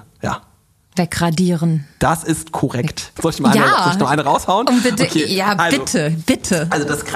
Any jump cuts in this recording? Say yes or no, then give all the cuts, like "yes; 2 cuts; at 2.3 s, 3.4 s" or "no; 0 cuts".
yes; 1 cut; at 3.2 s